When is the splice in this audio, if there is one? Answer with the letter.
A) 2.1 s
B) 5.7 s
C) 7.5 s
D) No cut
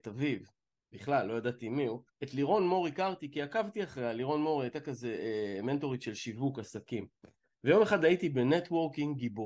A